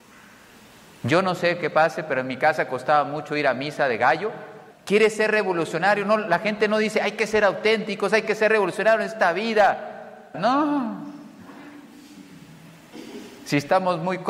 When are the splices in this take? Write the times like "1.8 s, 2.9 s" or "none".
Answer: 4.7 s, 10.3 s